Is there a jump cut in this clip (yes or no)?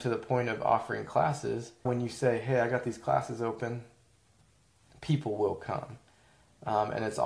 yes